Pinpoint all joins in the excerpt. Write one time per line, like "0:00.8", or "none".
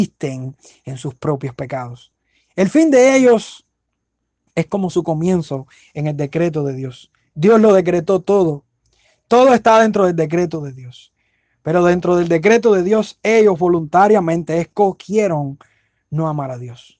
none